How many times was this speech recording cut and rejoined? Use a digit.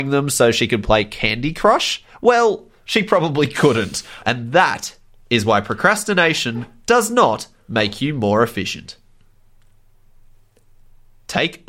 1